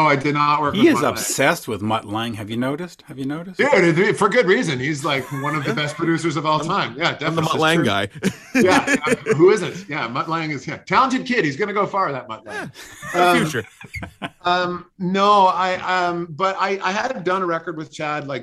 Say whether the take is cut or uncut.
uncut